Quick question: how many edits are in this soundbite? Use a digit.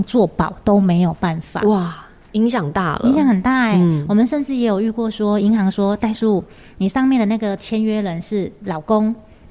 0